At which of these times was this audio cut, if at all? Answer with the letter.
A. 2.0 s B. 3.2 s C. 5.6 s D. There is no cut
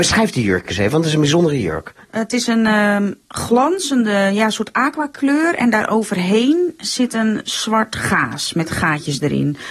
A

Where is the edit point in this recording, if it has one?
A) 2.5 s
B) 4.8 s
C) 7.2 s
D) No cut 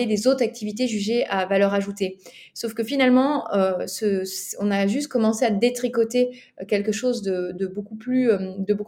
D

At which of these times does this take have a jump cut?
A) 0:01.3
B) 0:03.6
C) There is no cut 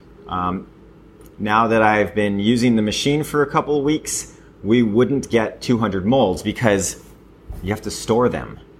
A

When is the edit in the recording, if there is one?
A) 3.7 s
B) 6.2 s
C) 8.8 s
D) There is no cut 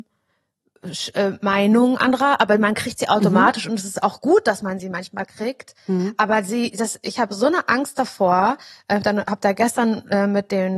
D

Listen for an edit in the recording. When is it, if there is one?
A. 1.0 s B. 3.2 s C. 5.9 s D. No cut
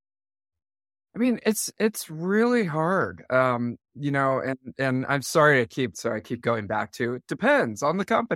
C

